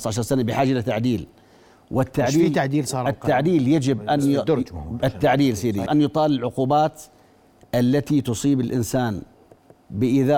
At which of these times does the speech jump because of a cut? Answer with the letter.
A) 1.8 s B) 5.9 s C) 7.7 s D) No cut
B